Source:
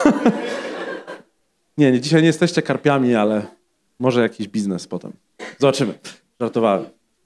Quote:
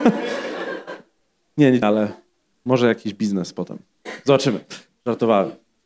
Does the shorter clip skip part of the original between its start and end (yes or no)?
yes